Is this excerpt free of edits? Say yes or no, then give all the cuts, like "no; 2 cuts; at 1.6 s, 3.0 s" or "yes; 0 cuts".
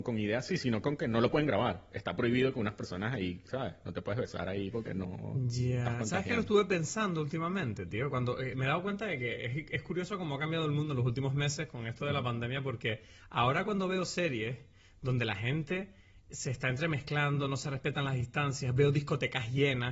yes; 0 cuts